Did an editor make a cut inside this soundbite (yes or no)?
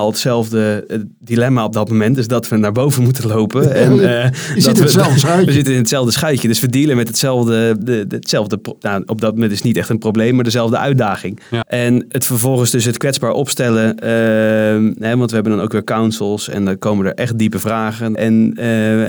yes